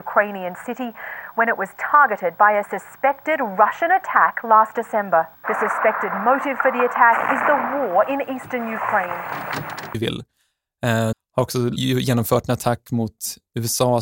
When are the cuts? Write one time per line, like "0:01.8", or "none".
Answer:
0:09.9
0:11.1